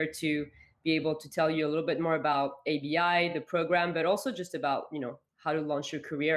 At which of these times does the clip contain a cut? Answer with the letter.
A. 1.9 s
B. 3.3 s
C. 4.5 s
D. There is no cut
D